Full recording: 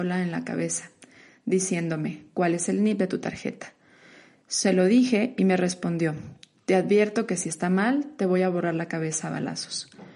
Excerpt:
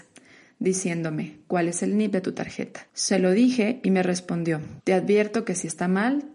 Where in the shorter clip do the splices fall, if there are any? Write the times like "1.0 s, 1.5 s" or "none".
2.9 s, 4.8 s